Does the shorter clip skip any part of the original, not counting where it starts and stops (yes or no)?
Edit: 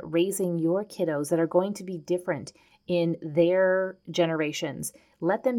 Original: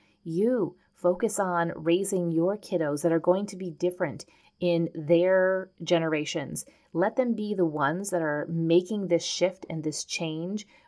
no